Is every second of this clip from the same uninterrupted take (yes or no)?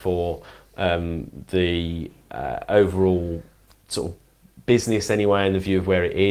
yes